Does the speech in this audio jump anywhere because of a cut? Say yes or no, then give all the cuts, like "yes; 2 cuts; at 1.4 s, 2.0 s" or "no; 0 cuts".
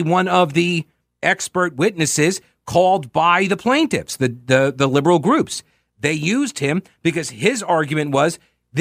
no; 0 cuts